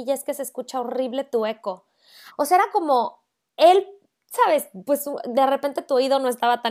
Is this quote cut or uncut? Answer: cut